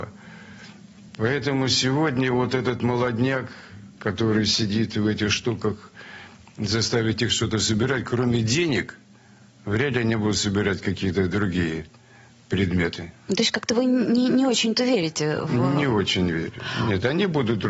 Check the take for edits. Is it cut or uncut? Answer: uncut